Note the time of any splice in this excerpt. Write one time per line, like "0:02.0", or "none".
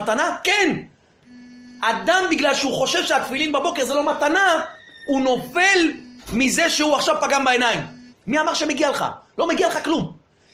0:08.1